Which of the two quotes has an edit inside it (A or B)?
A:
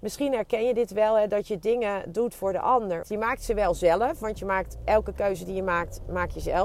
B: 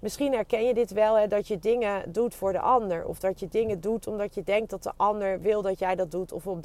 A